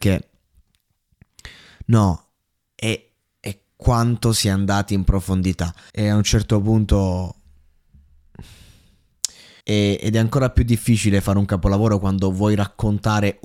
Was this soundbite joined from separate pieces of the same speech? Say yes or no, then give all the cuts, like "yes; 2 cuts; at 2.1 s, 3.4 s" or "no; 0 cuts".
yes; 2 cuts; at 5.9 s, 9.6 s